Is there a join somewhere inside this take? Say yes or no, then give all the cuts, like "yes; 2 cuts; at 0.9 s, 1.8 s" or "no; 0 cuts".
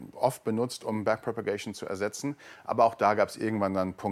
no; 0 cuts